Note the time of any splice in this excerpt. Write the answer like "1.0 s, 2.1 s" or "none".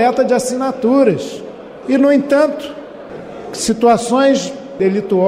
1.8 s